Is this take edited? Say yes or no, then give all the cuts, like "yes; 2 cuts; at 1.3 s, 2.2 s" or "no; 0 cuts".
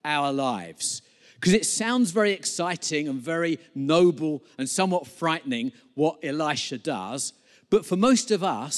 no; 0 cuts